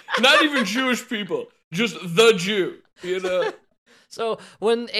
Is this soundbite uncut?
yes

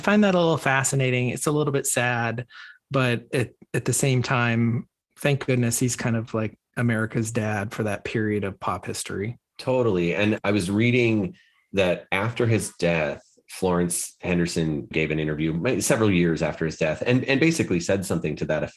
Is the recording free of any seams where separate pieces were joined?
no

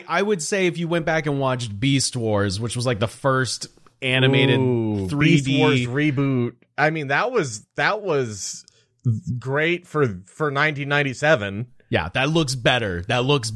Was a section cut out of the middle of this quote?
no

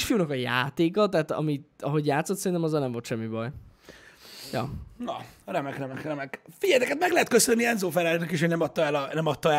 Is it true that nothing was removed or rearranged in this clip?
yes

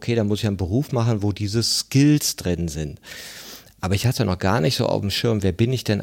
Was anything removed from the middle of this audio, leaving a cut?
no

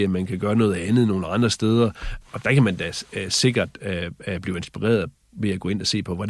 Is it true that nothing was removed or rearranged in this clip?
no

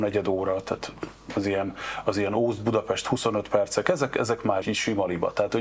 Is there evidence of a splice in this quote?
yes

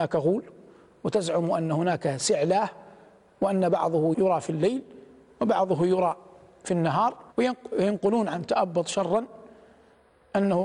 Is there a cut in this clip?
yes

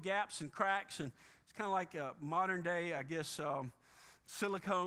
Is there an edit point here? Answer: no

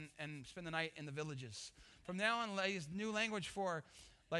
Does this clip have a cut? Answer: no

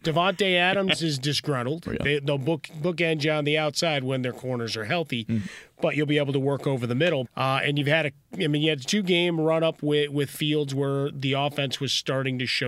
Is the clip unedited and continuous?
no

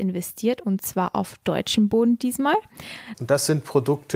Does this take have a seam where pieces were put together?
yes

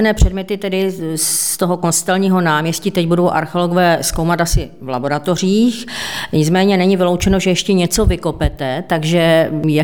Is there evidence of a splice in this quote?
no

